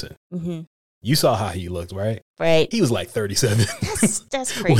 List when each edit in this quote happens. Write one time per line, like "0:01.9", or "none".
none